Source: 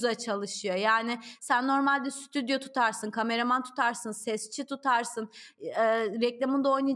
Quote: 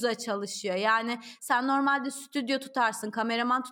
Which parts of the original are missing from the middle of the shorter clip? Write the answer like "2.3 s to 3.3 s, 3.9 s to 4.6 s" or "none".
none